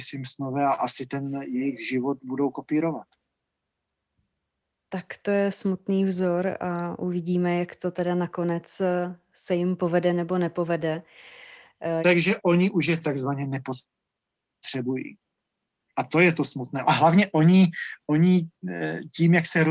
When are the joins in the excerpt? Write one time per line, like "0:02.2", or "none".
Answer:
0:12.0
0:16.8